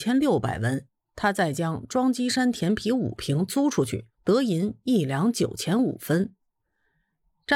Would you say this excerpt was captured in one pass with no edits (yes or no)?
no